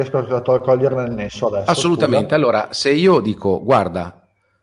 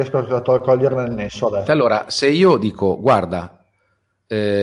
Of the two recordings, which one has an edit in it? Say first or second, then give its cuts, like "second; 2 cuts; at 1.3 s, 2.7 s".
second; 1 cut; at 1.7 s